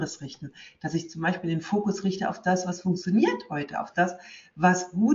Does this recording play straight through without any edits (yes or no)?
yes